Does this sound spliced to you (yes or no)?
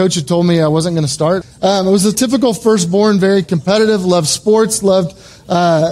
yes